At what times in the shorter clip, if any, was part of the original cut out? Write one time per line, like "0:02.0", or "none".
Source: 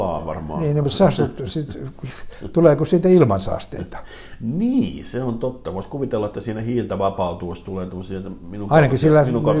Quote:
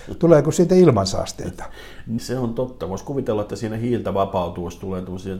0:02.2